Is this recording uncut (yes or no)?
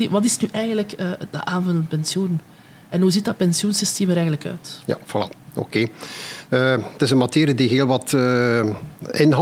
yes